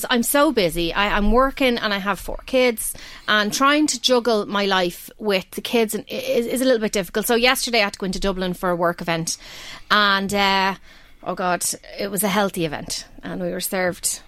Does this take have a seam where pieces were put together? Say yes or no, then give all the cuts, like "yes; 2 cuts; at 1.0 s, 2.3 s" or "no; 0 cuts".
no; 0 cuts